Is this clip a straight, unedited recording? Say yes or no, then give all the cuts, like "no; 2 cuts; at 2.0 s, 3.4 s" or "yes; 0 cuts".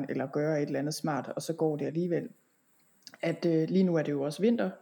yes; 0 cuts